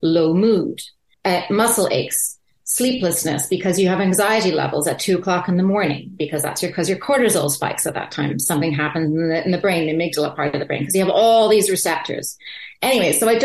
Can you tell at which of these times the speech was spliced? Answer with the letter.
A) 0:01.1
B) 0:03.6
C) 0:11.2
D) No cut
A